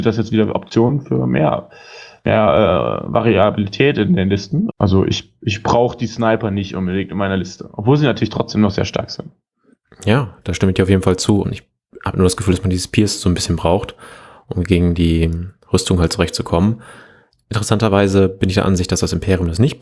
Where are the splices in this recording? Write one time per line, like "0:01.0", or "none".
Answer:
0:04.7
0:11.4